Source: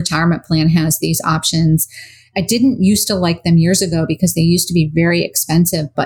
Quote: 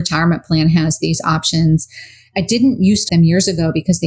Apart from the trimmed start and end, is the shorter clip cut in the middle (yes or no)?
yes